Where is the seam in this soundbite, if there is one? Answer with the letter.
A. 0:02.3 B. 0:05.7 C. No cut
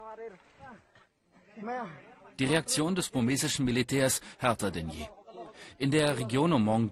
C